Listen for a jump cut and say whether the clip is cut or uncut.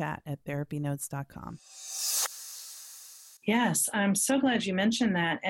cut